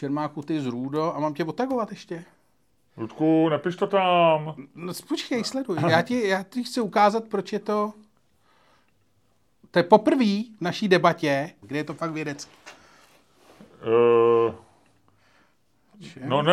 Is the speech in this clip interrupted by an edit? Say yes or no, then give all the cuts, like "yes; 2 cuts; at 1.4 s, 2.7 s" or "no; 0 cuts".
yes; 1 cut; at 11.6 s